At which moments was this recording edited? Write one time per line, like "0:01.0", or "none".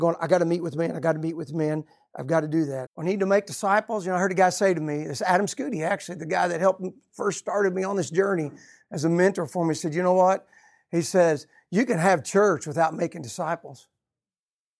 0:02.9